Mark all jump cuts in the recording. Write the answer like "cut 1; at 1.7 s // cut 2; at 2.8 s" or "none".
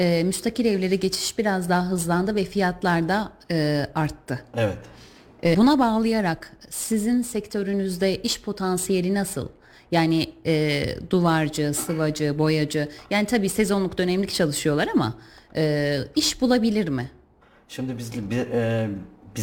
cut 1; at 5.5 s

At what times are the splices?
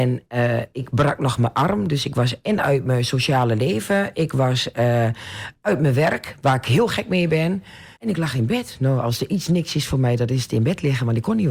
cut 1; at 7.9 s

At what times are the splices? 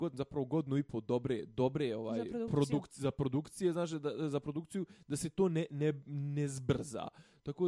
none

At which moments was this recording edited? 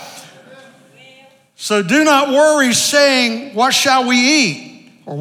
none

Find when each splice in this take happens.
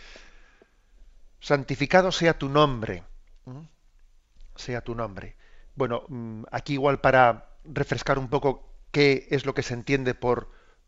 none

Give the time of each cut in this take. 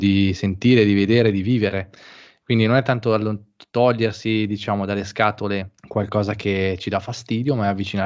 cut 1; at 5.8 s

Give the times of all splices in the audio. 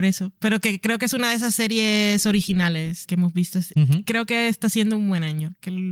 cut 1; at 3.1 s

